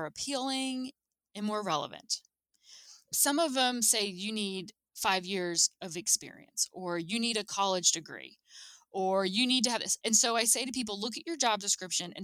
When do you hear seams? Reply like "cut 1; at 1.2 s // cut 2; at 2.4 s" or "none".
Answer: cut 1; at 3.0 s // cut 2; at 10.0 s